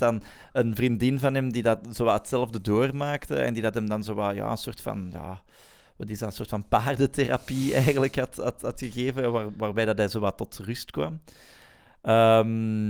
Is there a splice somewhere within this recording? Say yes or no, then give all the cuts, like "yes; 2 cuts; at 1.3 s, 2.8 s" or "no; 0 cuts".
no; 0 cuts